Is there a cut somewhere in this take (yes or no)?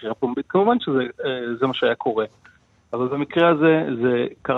no